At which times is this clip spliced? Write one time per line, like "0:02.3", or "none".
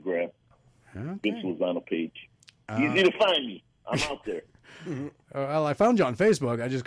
none